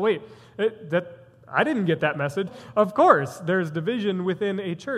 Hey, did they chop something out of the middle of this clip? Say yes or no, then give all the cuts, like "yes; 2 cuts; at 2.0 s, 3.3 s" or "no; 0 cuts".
yes; 1 cut; at 2.5 s